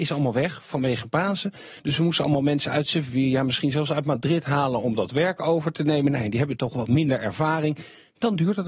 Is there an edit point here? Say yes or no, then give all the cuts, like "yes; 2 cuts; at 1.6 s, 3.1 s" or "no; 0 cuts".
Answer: no; 0 cuts